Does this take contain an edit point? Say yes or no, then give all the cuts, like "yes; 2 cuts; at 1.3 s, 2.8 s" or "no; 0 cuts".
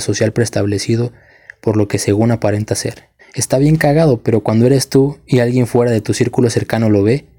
yes; 1 cut; at 3.2 s